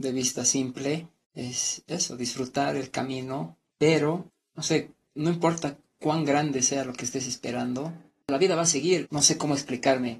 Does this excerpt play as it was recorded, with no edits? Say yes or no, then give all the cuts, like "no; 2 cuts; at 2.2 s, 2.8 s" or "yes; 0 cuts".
no; 1 cut; at 9.1 s